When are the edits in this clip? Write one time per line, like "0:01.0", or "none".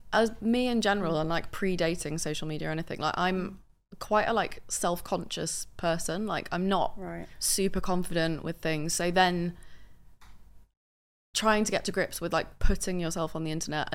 none